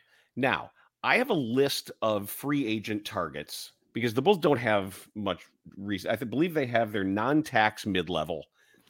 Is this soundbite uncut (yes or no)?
yes